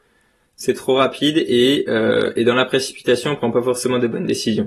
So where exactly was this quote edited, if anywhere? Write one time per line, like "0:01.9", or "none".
none